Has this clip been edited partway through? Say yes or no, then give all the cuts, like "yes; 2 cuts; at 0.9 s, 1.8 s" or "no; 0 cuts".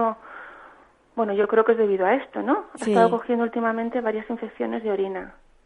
no; 0 cuts